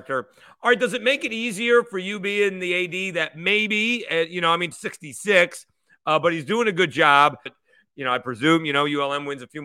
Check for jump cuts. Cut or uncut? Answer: cut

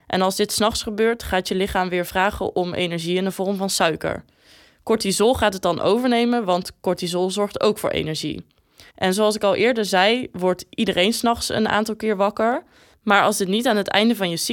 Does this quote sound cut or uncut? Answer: cut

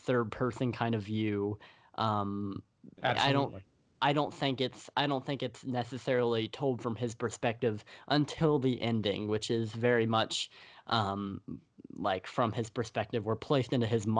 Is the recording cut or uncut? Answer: uncut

